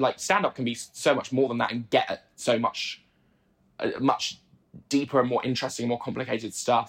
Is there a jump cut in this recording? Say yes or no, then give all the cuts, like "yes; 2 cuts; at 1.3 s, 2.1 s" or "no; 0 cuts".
no; 0 cuts